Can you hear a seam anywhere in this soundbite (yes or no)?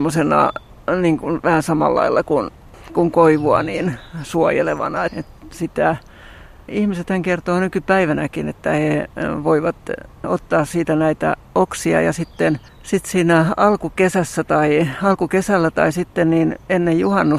yes